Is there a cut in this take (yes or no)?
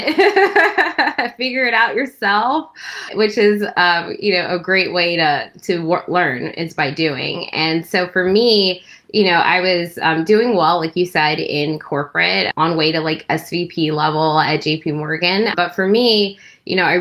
no